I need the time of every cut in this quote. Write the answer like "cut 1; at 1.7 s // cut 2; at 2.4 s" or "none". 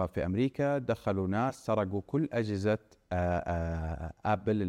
none